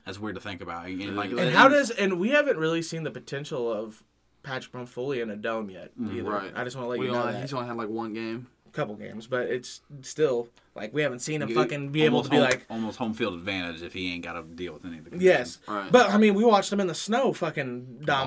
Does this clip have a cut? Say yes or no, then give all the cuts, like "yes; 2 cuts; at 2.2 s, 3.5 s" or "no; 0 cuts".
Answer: no; 0 cuts